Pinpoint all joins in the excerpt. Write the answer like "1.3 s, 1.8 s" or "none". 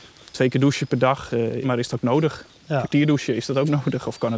1.6 s